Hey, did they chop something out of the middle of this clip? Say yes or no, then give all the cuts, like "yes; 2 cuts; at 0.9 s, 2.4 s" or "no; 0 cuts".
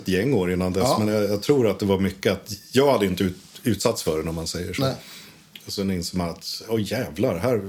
no; 0 cuts